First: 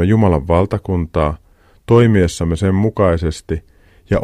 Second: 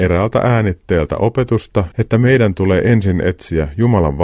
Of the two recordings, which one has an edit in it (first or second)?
second